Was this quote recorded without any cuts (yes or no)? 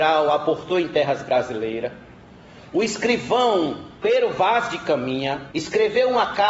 no